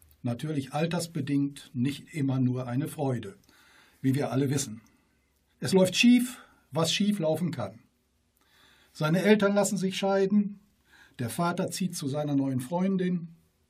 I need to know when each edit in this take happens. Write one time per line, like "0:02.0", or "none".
0:05.5